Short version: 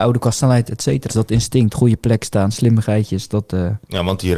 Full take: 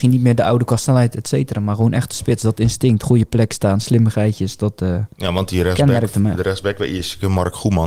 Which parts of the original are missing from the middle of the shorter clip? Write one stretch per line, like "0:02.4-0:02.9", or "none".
0:01.5-0:02.4